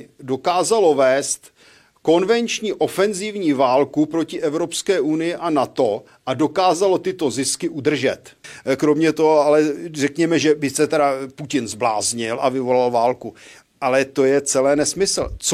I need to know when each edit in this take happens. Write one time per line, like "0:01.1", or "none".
none